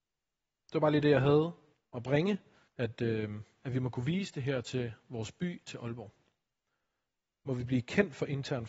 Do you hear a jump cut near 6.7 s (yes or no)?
no